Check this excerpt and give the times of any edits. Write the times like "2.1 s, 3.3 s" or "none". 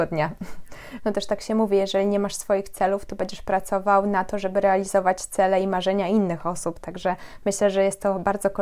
1.0 s